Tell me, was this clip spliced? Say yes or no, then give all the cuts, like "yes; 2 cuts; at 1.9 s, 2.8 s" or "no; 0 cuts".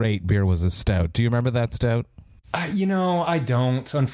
no; 0 cuts